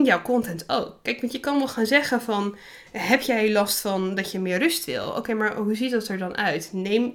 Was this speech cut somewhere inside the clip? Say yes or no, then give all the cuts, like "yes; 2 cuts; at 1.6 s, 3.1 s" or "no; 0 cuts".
no; 0 cuts